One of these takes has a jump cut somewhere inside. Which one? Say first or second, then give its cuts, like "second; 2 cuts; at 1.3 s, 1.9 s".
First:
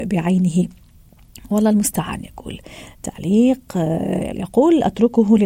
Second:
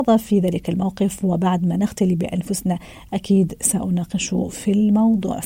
first; 1 cut; at 4.3 s